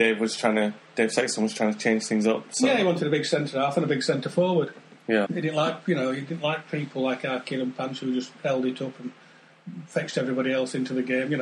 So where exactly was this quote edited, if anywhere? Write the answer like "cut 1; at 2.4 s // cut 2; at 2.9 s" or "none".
cut 1; at 5.3 s